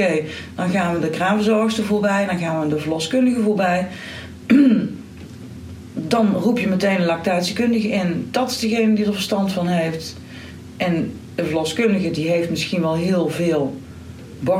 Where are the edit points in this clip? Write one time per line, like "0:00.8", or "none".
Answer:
none